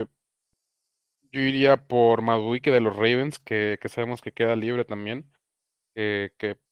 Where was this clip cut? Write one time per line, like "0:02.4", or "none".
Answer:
none